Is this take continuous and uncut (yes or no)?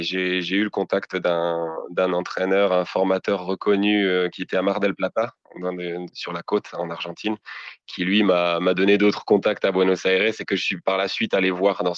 no